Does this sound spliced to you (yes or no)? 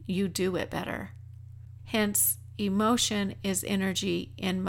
yes